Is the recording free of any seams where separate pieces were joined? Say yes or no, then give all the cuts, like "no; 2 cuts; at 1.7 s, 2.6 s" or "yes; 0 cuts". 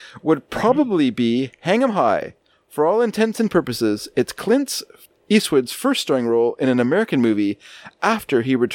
yes; 0 cuts